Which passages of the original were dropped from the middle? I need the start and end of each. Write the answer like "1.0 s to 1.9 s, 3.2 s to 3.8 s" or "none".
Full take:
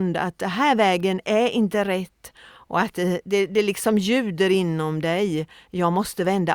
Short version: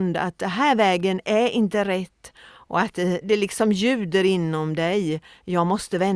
3.2 s to 3.5 s